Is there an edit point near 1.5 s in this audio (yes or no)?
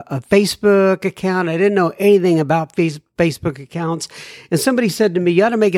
no